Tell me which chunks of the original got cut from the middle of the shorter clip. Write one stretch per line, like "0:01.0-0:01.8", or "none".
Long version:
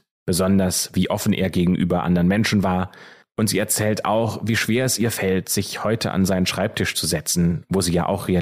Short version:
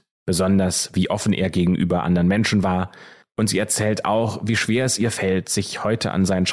none

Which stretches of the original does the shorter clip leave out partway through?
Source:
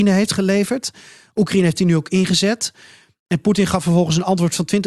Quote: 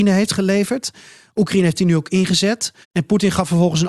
0:02.8-0:03.2

